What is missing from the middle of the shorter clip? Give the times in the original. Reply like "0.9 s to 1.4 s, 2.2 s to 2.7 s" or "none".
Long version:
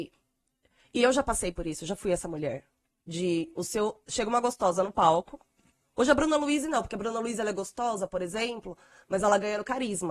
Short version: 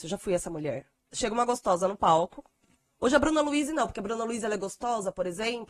2.9 s to 4.0 s